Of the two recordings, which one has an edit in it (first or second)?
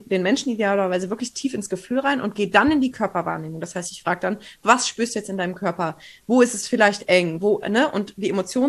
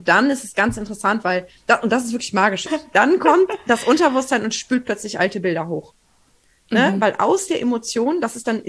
second